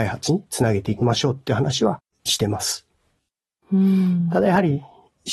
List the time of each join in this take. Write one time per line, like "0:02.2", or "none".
0:03.6